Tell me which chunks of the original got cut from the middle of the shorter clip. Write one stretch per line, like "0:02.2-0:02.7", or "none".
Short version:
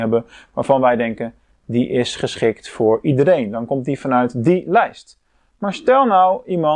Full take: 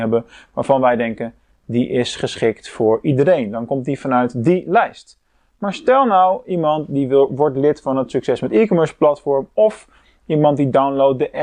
none